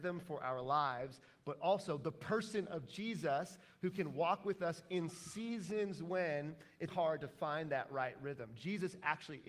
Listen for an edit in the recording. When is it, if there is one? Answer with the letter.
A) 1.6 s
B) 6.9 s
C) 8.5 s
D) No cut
B